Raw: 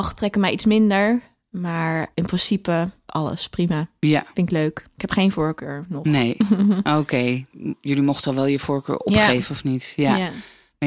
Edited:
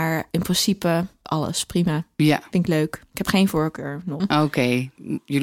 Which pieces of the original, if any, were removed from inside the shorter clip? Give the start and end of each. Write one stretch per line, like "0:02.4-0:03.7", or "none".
0:06.0-0:06.8